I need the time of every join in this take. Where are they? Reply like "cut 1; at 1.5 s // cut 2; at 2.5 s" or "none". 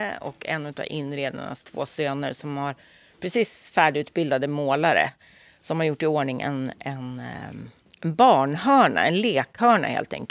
none